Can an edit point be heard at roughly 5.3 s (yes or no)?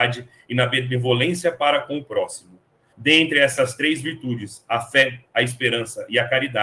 no